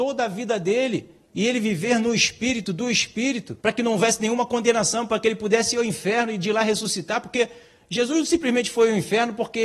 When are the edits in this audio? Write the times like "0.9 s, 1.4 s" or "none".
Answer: 3.6 s